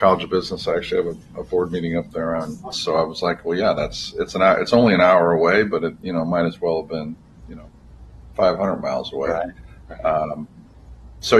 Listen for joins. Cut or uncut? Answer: cut